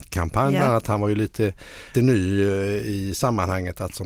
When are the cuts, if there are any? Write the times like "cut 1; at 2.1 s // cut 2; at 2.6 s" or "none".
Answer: cut 1; at 1.9 s